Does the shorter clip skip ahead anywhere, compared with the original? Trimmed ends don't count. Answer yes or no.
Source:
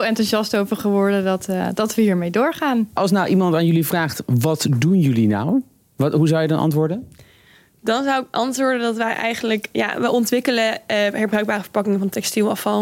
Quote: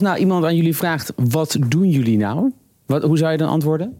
no